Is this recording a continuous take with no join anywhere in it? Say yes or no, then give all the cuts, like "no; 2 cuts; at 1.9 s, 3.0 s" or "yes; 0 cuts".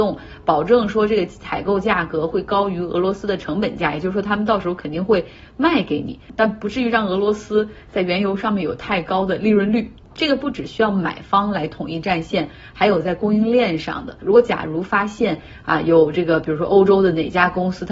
no; 2 cuts; at 10.1 s, 14.2 s